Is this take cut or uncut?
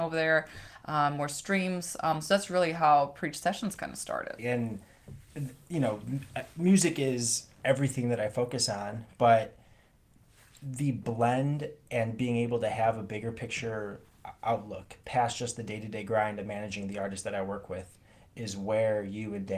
cut